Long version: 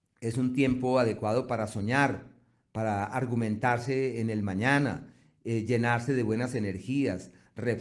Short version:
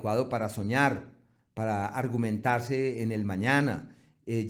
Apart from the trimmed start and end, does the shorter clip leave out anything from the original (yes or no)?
no